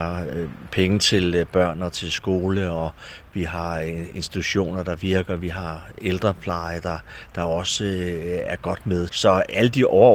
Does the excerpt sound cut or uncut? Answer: cut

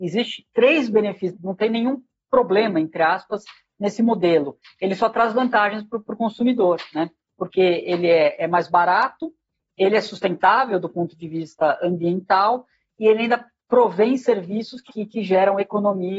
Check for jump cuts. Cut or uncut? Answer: cut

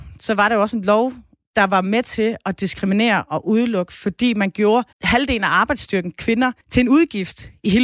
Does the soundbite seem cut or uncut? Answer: cut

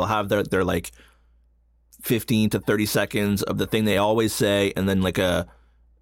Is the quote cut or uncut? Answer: uncut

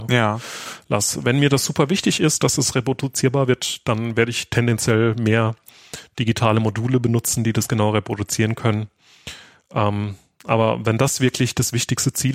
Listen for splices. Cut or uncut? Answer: uncut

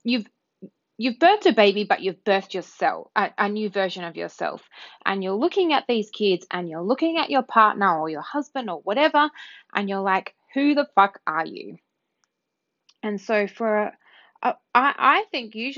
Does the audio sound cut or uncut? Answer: uncut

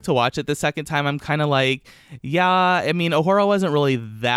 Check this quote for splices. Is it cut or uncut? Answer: uncut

